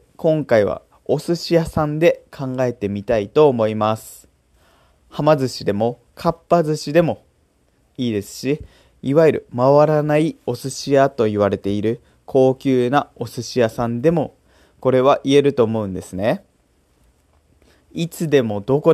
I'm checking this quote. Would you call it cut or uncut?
cut